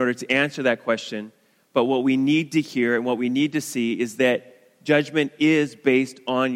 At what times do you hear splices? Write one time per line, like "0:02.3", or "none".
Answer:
none

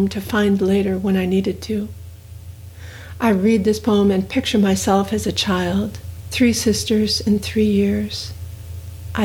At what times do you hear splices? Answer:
0:06.3

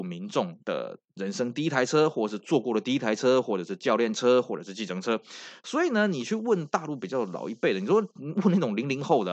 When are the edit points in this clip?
none

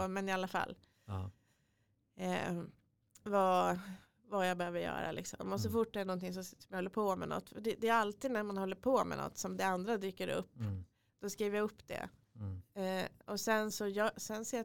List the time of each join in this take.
0:13.7

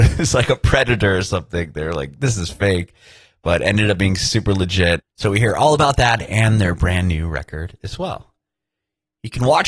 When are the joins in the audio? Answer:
0:05.0

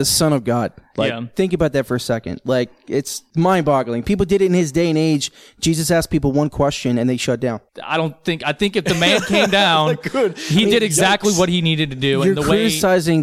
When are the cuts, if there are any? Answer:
0:07.7

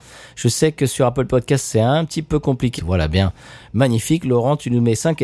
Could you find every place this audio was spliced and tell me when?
0:02.8

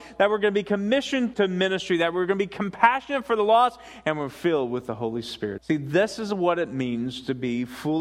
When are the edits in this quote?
0:01.3
0:05.6

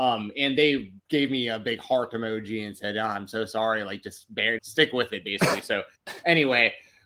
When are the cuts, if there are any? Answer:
0:01.0
0:04.6

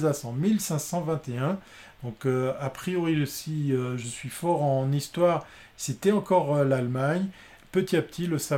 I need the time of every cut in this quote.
none

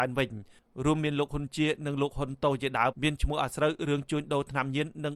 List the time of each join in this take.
0:02.9

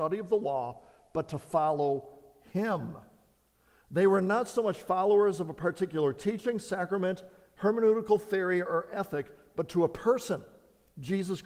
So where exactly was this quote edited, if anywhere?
none

